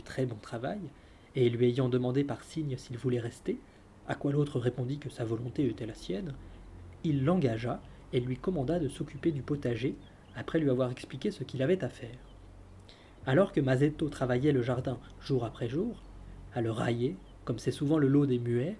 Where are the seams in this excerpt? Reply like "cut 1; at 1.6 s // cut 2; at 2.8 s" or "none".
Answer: cut 1; at 13.2 s // cut 2; at 16.5 s